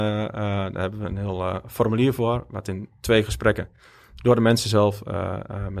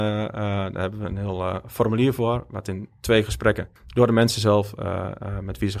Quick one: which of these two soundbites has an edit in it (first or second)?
second